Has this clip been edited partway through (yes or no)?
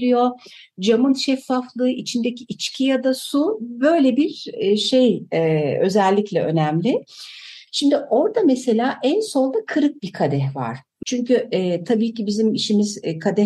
yes